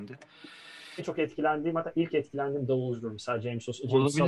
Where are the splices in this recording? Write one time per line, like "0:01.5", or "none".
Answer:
0:01.0